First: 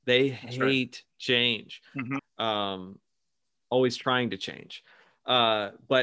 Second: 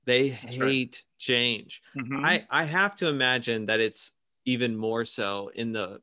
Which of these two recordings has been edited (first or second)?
first